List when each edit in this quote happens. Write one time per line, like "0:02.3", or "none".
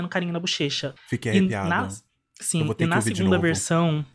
0:01.0